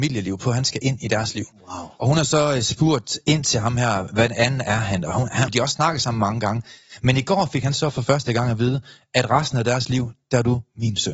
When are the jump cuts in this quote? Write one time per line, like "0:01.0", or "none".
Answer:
0:05.5